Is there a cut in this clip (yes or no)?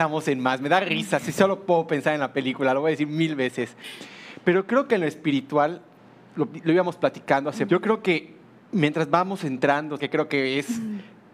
yes